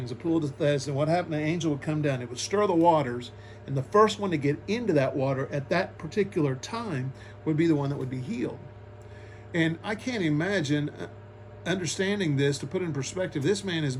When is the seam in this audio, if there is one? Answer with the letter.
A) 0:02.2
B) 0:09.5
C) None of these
C